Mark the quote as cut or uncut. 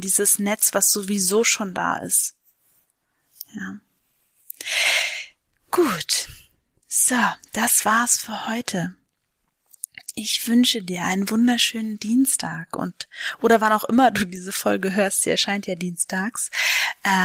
uncut